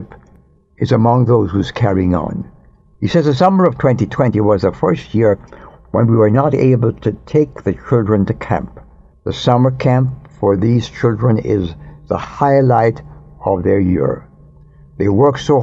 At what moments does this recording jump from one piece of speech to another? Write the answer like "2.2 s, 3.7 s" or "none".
2.9 s, 9.1 s